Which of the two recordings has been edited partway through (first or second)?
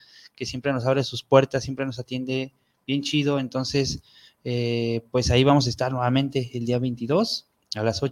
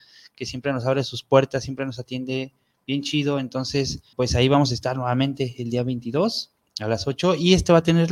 second